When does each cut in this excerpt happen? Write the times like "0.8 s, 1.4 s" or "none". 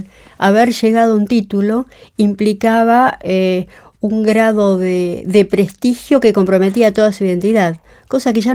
none

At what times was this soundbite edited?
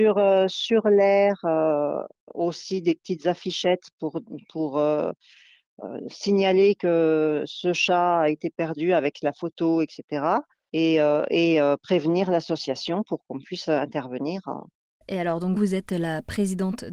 15.6 s

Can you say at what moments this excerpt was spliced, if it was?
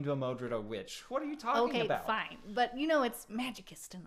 none

